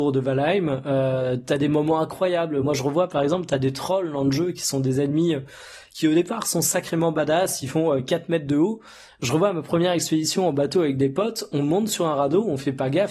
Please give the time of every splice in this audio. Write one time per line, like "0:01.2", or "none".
none